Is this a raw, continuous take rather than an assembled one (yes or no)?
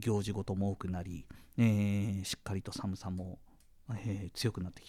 yes